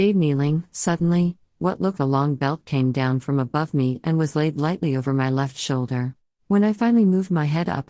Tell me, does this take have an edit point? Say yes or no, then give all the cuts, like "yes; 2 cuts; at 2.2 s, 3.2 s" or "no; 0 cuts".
yes; 2 cuts; at 2.0 s, 6.3 s